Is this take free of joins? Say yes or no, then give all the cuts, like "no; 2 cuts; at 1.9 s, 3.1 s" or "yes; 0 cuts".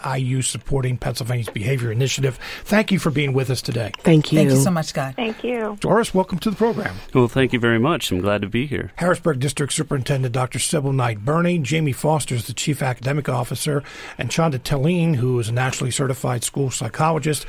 no; 2 cuts; at 5.8 s, 9.0 s